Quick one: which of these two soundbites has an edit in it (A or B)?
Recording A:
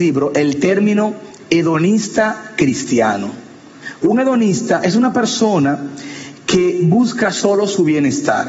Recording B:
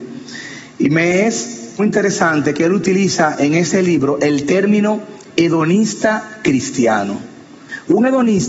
B